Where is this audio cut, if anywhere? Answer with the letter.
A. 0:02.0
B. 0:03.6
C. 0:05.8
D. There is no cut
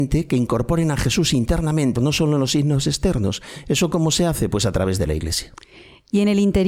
A